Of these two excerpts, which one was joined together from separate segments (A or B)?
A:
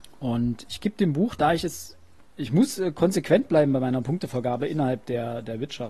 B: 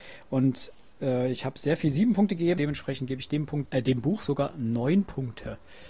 B